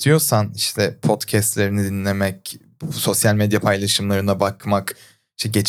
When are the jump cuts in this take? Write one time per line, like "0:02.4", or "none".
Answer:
none